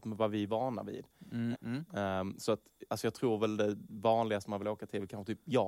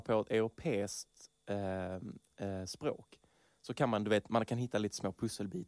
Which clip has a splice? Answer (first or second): first